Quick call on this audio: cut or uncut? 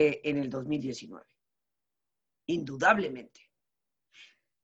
uncut